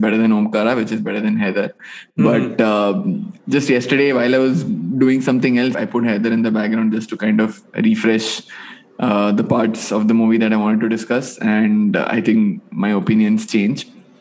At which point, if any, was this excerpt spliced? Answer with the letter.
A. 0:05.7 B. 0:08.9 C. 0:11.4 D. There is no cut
A